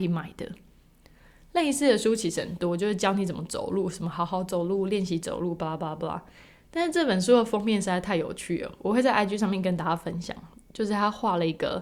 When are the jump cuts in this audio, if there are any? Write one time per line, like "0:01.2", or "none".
none